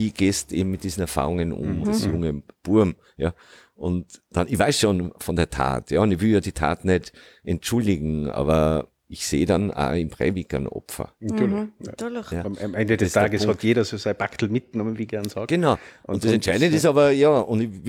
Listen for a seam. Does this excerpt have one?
yes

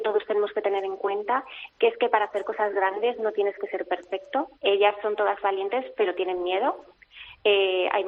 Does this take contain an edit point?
yes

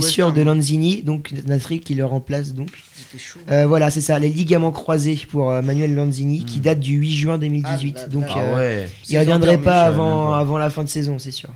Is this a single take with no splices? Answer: yes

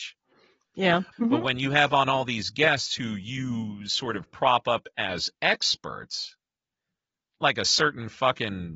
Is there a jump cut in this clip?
yes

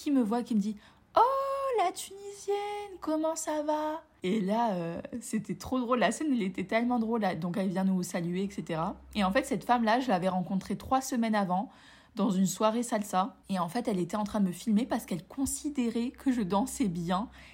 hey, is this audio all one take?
yes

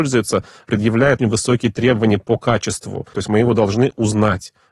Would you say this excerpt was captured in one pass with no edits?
no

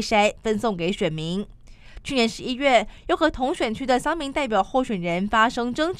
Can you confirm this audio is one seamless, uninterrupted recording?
yes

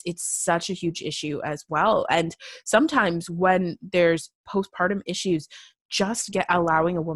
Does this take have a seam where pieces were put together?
no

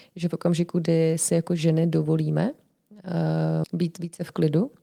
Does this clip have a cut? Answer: yes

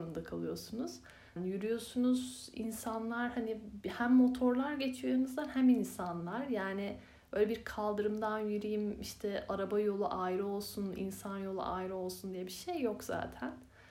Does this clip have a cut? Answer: yes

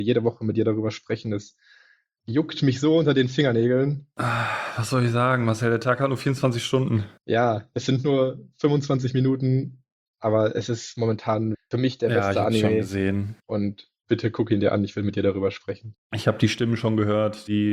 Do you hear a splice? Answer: no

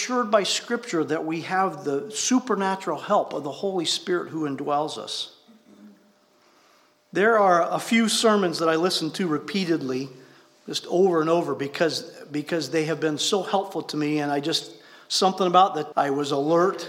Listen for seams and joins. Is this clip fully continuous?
no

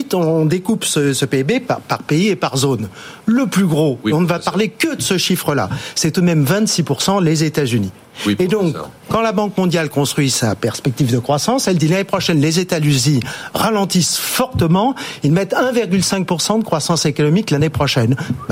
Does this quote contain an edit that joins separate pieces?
no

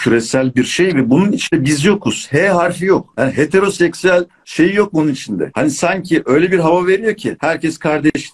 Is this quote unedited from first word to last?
yes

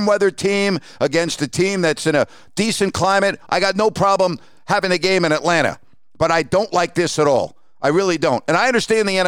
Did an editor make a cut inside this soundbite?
yes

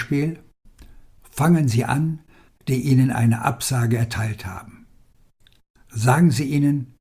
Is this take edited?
yes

